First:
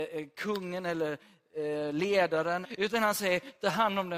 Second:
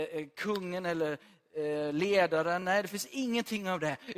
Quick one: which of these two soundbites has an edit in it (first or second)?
first